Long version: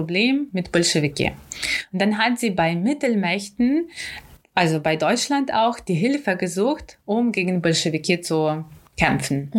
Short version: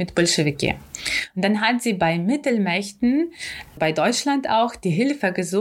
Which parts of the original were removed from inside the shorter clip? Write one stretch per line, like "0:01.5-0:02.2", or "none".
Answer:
0:04.3-0:04.8